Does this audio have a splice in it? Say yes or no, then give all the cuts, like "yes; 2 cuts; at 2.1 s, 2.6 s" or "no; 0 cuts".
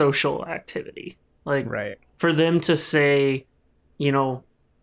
no; 0 cuts